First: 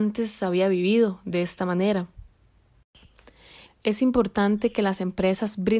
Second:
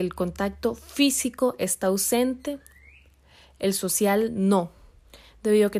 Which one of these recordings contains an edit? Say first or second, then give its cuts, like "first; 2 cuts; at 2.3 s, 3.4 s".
first; 1 cut; at 3.6 s